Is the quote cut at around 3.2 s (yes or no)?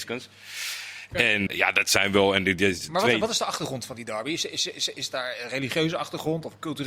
no